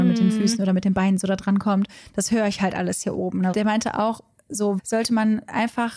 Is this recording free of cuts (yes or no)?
no